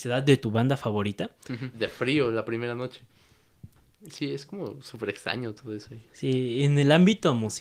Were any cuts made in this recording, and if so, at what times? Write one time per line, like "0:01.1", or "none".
0:01.7
0:03.9
0:06.1